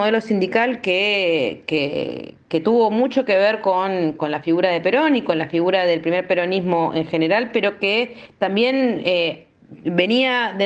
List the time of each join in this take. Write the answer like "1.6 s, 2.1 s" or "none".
none

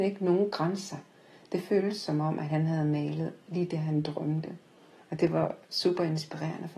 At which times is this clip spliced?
5.0 s

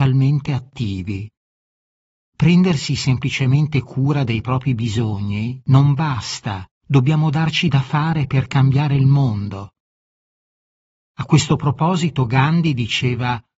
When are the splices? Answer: 6.7 s

